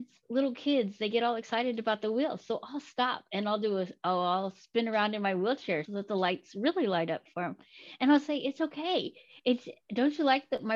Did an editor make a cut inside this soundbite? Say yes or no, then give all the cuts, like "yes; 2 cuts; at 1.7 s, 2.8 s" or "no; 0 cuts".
yes; 1 cut; at 5.9 s